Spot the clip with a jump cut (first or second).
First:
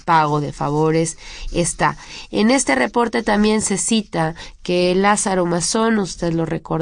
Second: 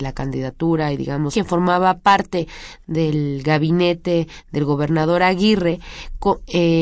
second